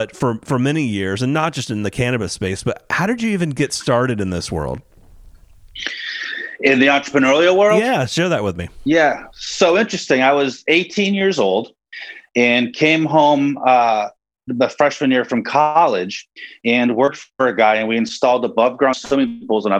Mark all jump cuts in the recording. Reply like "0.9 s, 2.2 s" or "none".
none